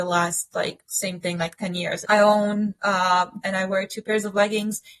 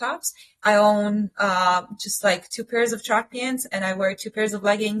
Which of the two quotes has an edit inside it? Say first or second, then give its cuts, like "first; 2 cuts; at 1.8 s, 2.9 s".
first; 2 cuts; at 2.0 s, 3.4 s